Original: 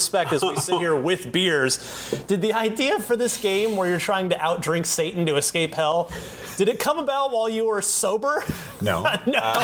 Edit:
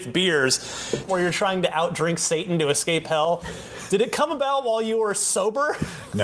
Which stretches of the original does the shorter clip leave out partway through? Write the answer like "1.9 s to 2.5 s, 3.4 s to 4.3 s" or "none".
2.3 s to 3.7 s